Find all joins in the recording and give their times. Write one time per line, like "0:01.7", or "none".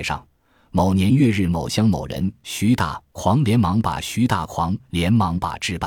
none